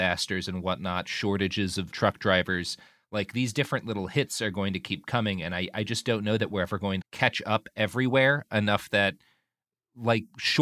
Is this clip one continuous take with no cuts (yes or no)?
no